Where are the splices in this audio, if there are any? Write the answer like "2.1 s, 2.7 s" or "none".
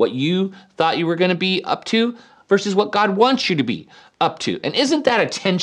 none